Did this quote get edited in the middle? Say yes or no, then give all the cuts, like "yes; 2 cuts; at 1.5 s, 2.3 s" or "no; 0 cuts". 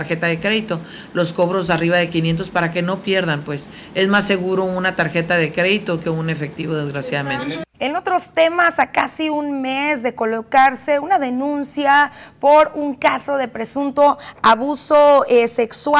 yes; 1 cut; at 7.7 s